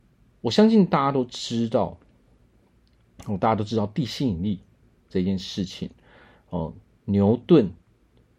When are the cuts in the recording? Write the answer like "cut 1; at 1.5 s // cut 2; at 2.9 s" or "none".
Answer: none